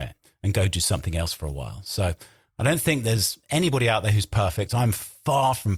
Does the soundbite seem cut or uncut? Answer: uncut